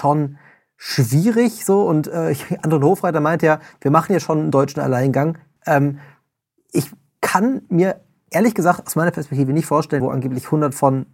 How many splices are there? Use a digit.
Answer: 2